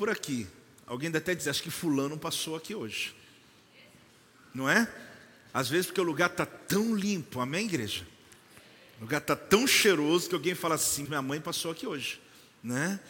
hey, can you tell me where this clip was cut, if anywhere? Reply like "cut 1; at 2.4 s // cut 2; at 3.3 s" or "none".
cut 1; at 1.5 s // cut 2; at 11.1 s

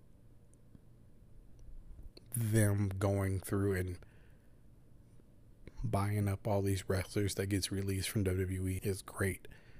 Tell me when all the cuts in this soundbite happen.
cut 1; at 8.8 s

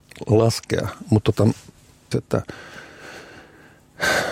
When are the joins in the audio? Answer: cut 1; at 2.1 s

